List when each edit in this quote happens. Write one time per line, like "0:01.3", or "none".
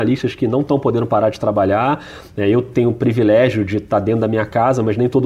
none